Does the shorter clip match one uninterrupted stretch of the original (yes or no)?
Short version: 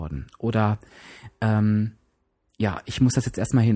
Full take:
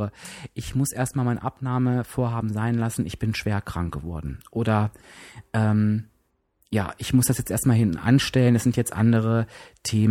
yes